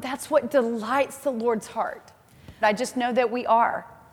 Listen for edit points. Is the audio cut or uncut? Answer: cut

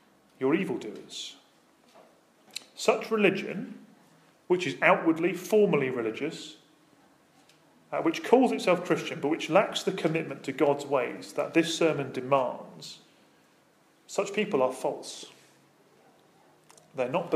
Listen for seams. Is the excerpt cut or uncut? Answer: uncut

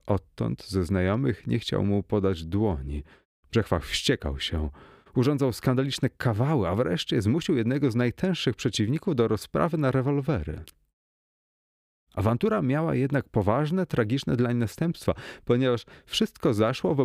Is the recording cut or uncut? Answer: cut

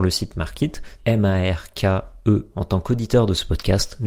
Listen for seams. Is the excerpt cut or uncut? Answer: cut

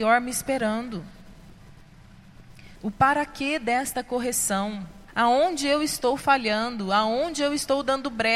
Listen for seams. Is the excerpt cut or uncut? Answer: cut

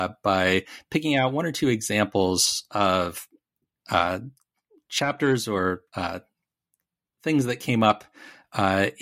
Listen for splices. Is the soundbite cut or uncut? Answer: cut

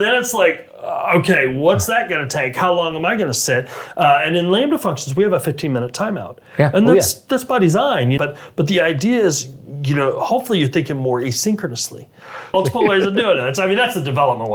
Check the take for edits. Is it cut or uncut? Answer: cut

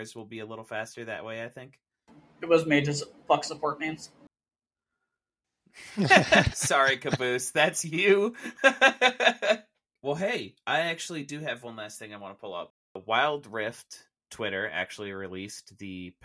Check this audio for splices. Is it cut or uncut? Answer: uncut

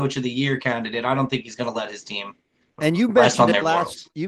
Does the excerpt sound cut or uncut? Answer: uncut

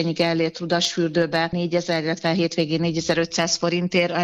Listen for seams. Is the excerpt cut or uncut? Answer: uncut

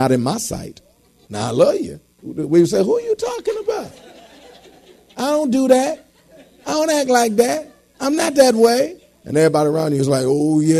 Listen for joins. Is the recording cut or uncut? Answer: cut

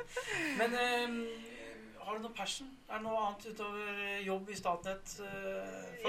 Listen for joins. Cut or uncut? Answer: uncut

